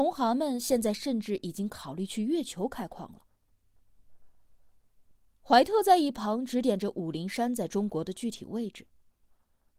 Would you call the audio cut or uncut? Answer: uncut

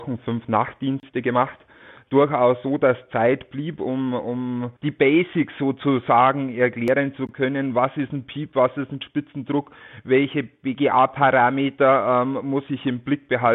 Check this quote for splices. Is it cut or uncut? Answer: cut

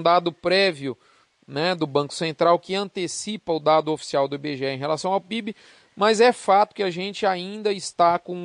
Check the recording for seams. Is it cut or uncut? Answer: uncut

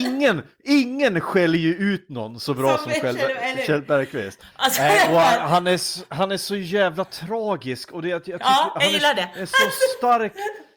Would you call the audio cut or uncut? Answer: cut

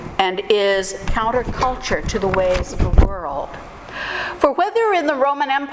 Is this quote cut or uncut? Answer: cut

